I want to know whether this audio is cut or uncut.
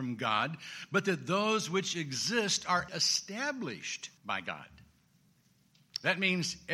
cut